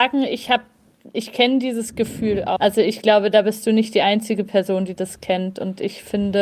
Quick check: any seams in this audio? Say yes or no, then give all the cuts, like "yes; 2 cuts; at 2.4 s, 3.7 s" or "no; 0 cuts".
yes; 1 cut; at 2.6 s